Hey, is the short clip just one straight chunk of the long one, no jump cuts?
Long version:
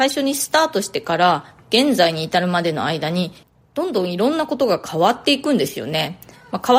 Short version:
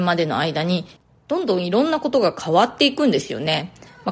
yes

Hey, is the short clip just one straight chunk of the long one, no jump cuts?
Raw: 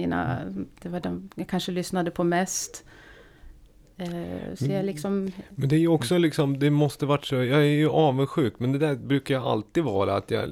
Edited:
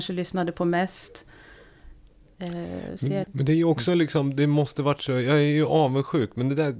no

